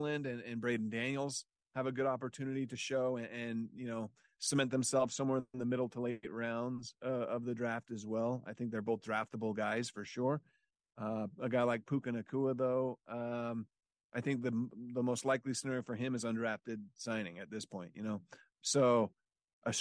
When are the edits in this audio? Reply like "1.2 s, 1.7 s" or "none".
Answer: none